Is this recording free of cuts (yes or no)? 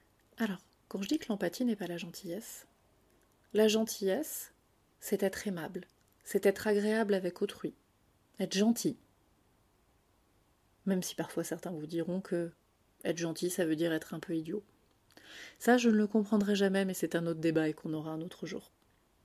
no